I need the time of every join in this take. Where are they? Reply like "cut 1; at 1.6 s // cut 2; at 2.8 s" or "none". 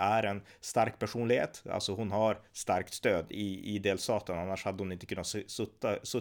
none